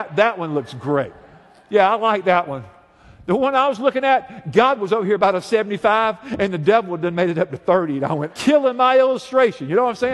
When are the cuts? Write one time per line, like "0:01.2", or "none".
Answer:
0:08.3